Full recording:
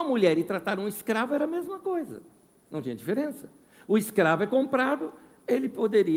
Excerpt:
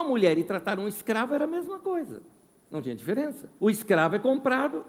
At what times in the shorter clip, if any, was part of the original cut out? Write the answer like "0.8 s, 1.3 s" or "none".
3.6 s